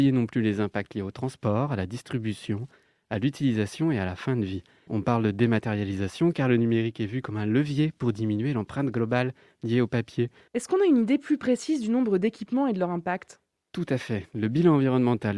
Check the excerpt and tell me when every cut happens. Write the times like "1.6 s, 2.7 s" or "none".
4.9 s, 10.5 s